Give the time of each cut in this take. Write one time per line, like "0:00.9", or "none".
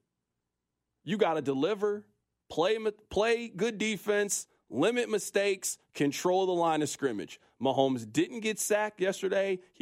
0:02.4